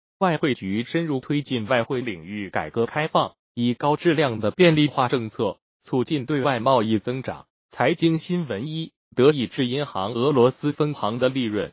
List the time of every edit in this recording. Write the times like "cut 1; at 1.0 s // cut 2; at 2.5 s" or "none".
cut 1; at 7.6 s // cut 2; at 9.1 s